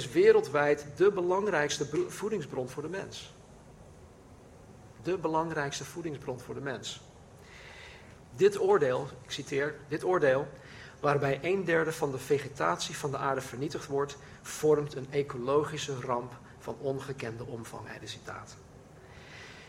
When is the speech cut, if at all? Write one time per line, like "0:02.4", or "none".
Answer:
0:04.9
0:08.2